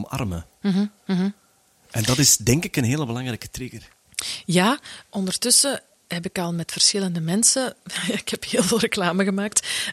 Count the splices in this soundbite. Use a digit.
1